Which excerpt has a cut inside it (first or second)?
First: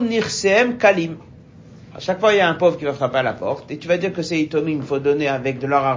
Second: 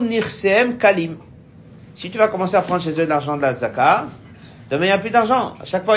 first